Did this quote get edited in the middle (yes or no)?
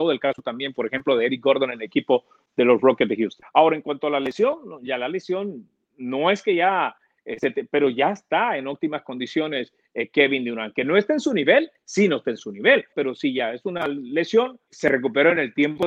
yes